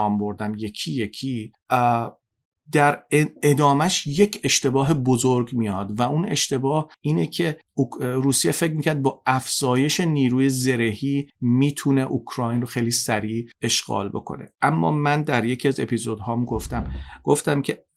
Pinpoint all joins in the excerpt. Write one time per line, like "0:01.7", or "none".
none